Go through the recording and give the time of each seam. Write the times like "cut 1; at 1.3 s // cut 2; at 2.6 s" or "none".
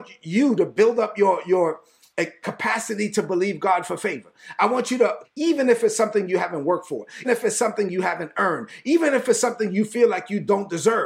cut 1; at 5.2 s // cut 2; at 7.2 s